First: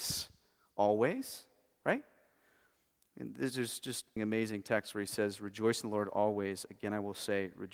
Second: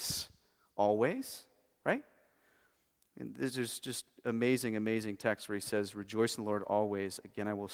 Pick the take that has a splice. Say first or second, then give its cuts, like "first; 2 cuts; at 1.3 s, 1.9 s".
first; 1 cut; at 4.2 s